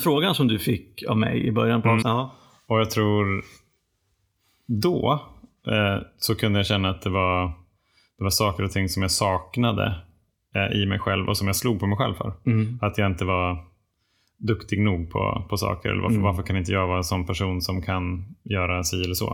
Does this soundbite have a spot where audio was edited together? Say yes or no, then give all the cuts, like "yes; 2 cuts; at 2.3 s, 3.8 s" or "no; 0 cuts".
yes; 1 cut; at 2.0 s